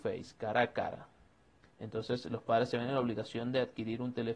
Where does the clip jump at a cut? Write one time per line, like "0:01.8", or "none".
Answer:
0:01.7